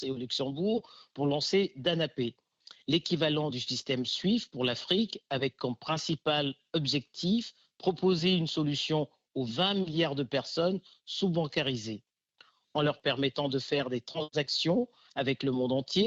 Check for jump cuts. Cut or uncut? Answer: uncut